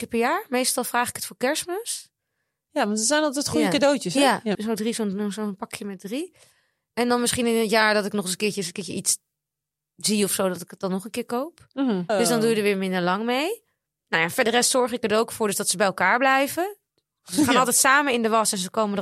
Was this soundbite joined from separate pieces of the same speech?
yes; 2 cuts; at 4.5 s, 12.1 s

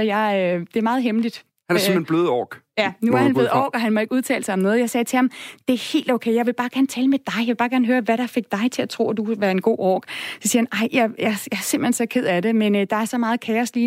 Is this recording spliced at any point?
no; 0 cuts

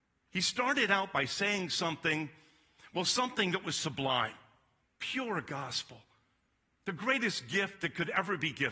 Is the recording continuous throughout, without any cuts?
no; 1 cut; at 4.8 s

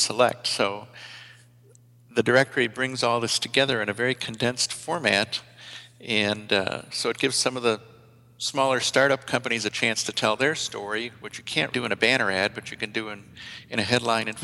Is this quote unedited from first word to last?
no; 1 cut; at 11.7 s

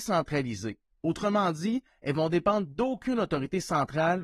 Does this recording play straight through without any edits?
yes; 0 cuts

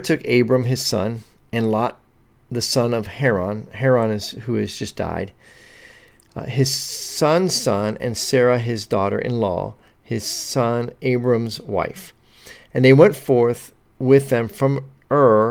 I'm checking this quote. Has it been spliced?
no; 0 cuts

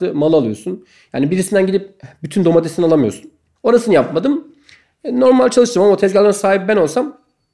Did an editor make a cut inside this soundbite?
yes; 1 cut; at 3.6 s

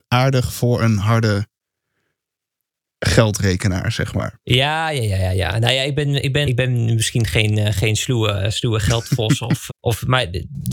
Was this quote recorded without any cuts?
no; 2 cuts; at 6.4 s, 9.7 s

